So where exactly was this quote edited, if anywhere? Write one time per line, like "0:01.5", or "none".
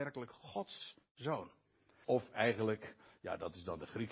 0:02.0